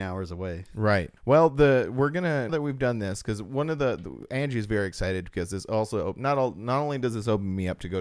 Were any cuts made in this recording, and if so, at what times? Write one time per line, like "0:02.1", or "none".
0:01.2
0:02.5